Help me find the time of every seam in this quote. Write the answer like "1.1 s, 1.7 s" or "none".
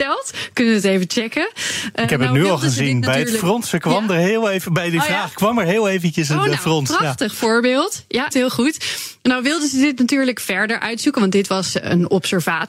8.3 s